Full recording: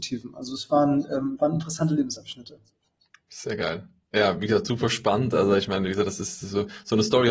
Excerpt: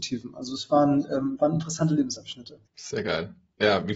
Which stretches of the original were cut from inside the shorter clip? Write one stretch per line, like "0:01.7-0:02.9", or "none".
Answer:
0:02.7-0:03.2